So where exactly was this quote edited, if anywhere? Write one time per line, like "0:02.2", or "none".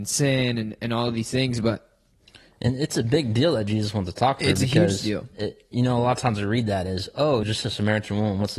0:07.4